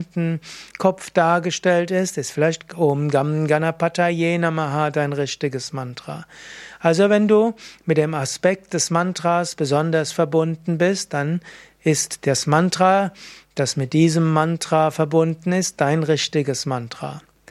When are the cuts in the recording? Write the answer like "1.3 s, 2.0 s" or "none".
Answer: none